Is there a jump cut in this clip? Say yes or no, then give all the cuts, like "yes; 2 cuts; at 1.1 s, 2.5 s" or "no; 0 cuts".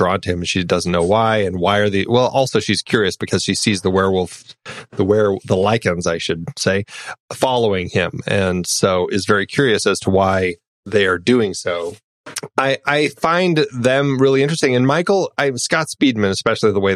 no; 0 cuts